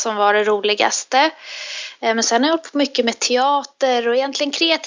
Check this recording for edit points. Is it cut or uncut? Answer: uncut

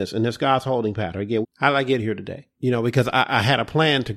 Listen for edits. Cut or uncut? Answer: cut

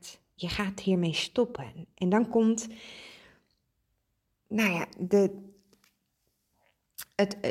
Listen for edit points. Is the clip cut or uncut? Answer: uncut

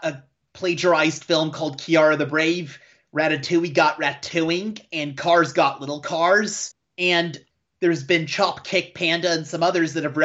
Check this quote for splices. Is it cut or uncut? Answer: uncut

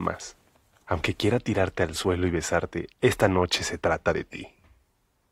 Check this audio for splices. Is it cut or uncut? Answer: cut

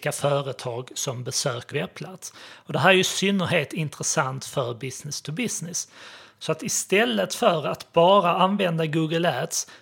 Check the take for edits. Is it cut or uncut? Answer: cut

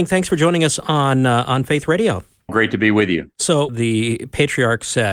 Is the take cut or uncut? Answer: cut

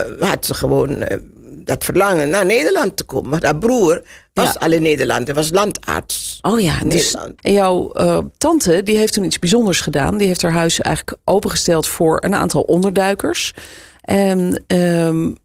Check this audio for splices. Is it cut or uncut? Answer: cut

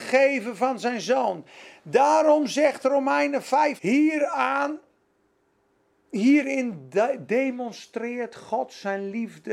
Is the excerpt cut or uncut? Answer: cut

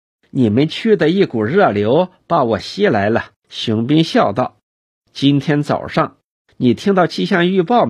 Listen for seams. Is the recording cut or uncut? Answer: cut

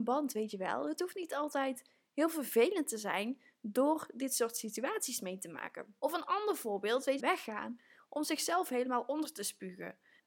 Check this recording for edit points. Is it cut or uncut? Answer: cut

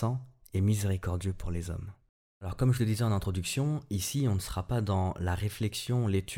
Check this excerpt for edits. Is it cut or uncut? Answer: uncut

